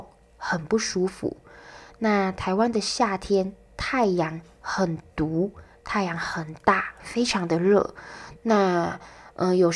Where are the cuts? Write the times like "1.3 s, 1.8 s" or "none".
8.4 s